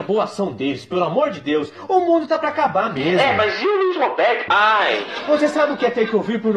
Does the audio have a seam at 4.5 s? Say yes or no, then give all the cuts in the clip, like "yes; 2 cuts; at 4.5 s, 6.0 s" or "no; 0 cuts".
yes; 1 cut; at 4.5 s